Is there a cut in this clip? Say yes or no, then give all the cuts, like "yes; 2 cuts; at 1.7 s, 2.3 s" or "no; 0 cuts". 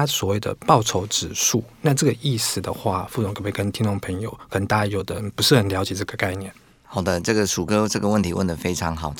no; 0 cuts